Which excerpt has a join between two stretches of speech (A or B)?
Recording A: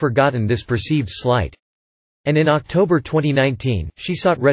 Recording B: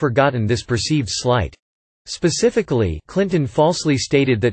B